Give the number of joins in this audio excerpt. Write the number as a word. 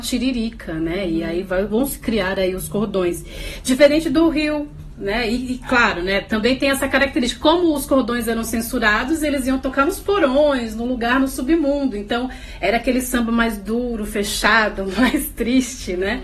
one